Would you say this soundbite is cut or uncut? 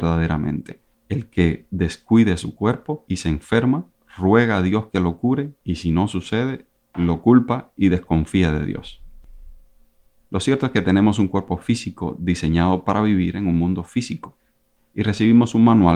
cut